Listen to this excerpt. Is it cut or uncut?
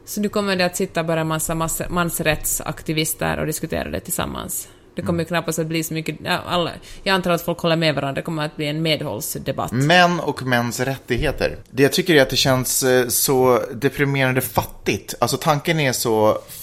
cut